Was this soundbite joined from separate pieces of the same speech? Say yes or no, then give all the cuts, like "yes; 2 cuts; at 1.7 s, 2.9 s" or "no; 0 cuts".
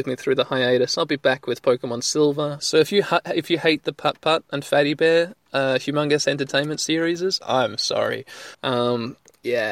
yes; 2 cuts; at 2.6 s, 8.5 s